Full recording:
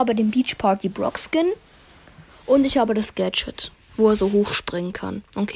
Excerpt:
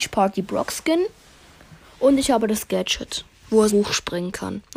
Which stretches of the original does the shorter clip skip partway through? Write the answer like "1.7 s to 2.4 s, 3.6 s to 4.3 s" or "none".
4.2 s to 4.3 s